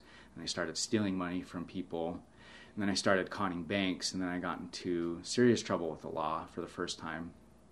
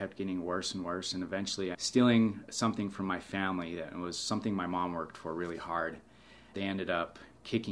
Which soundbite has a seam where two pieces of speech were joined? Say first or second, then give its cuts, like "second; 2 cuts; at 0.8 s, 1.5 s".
second; 2 cuts; at 1.7 s, 6.5 s